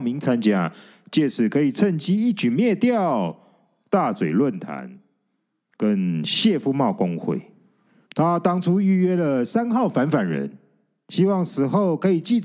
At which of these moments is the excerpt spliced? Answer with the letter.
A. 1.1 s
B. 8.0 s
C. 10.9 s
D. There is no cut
B